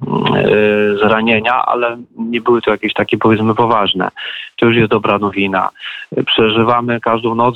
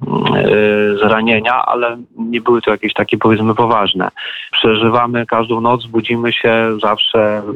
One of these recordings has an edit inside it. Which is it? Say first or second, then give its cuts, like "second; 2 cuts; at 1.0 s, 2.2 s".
second; 1 cut; at 4.5 s